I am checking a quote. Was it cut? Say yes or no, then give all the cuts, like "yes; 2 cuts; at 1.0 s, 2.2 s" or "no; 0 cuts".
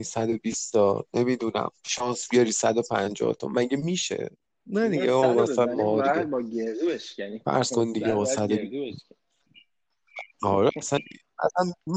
yes; 1 cut; at 10.3 s